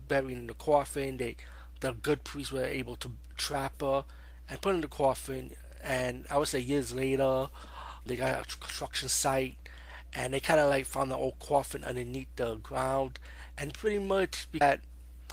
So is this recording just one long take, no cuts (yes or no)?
no